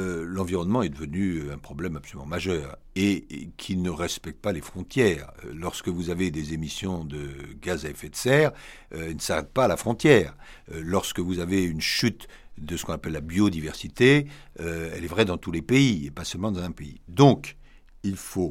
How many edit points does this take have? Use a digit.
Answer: 0